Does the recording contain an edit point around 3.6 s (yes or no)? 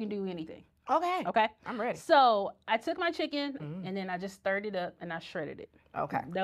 yes